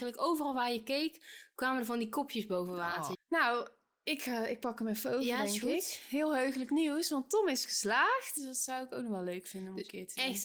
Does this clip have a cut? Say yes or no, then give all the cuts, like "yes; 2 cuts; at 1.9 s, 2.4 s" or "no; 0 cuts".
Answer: yes; 2 cuts; at 3.1 s, 8.4 s